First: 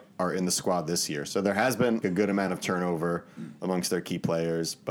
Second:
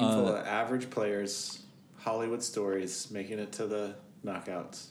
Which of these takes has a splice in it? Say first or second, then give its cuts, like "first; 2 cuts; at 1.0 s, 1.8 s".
first; 1 cut; at 2.0 s